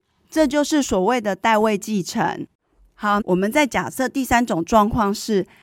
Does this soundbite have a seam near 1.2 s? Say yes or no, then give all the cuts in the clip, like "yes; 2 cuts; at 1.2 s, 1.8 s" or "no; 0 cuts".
no; 1 cut; at 3.2 s